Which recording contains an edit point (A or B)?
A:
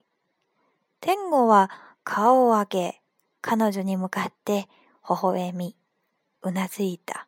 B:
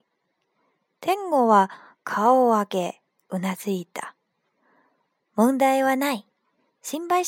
B